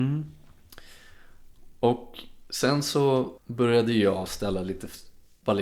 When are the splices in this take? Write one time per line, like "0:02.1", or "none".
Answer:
0:03.4